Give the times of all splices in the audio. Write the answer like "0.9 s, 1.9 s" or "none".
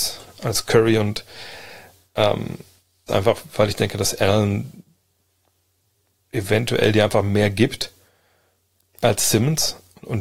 3.1 s

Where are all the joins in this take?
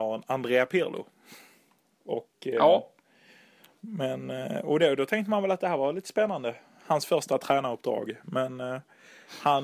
none

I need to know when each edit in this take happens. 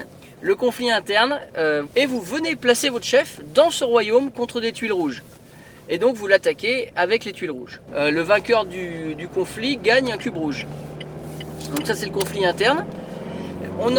1.9 s, 7.9 s

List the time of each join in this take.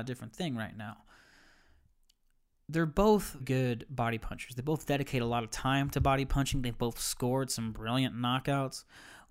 3.4 s

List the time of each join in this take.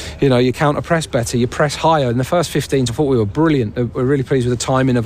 2.9 s, 3.9 s

